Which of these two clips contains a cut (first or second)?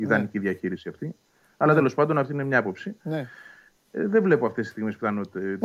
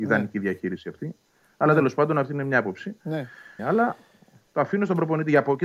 second